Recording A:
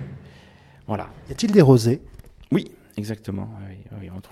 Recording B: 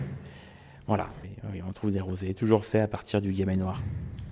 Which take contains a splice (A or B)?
B